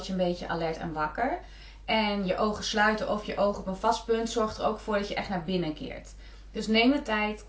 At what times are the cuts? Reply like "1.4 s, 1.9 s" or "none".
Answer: none

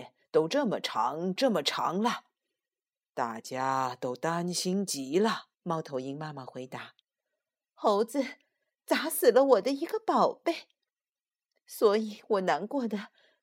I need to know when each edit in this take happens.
1.4 s, 5.5 s, 7.0 s

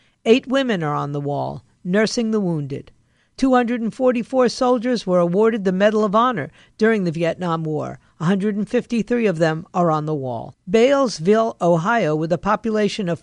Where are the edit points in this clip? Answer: none

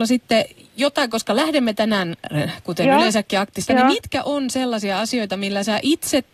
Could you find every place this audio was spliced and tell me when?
3.7 s

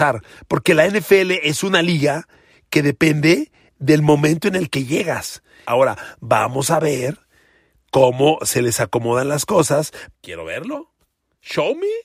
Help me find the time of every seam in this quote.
5.6 s, 10.1 s

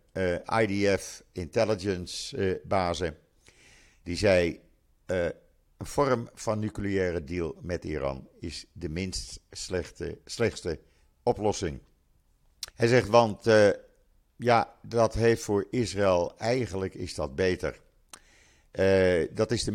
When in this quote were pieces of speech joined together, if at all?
12.7 s

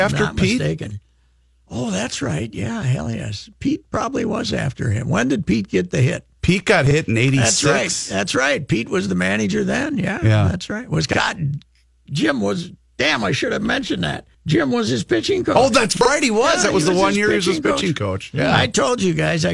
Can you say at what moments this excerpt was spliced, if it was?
14.3 s

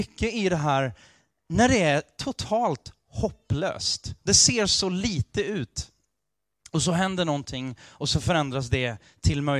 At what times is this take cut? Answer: none

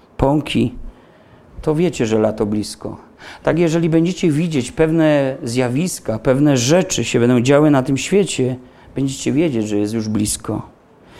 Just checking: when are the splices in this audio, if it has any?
none

